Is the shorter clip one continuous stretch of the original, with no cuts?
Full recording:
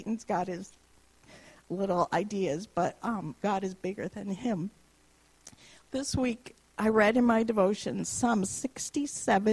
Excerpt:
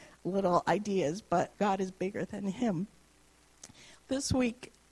no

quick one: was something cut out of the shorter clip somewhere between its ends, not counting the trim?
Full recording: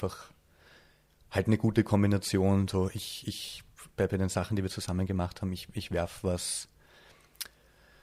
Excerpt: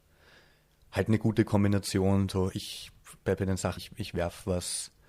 yes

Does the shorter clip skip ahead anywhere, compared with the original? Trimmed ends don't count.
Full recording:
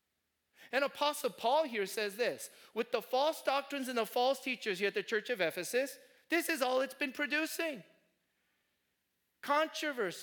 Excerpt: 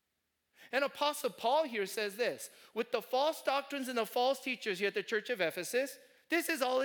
no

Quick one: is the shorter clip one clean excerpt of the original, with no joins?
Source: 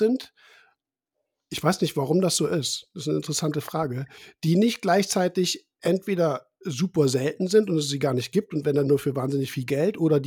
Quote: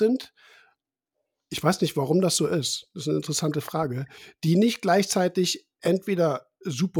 yes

